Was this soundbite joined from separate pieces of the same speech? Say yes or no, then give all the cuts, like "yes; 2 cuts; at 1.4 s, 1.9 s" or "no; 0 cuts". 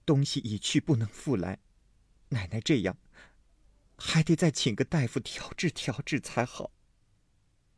no; 0 cuts